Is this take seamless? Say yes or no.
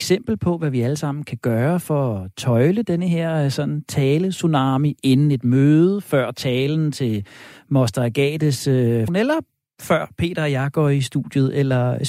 no